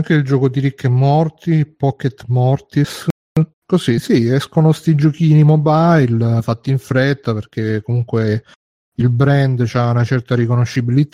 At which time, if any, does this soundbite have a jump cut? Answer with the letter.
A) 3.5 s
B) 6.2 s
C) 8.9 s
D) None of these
A